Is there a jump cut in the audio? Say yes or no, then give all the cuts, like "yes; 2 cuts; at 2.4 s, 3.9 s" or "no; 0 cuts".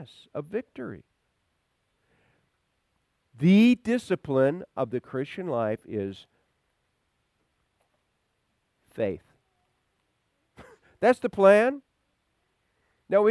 yes; 1 cut; at 10.0 s